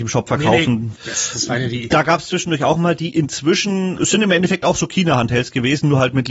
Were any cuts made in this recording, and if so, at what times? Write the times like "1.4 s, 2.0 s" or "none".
0.9 s, 4.0 s